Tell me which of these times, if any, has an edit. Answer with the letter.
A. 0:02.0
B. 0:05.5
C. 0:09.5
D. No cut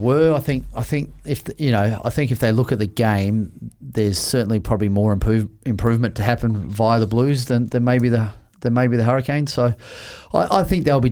D